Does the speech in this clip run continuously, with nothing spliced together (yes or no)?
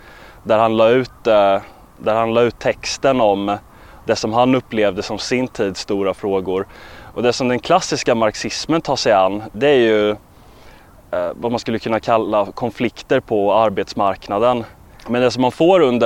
no